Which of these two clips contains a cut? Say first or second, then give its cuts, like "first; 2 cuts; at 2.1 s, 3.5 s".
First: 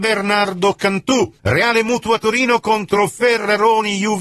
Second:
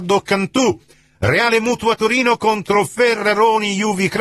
first; 1 cut; at 1.4 s